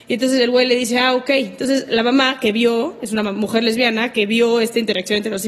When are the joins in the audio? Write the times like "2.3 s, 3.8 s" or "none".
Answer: none